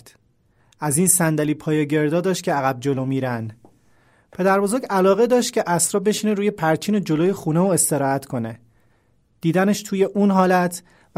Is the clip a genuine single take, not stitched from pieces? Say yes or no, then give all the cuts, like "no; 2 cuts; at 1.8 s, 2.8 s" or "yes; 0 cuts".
yes; 0 cuts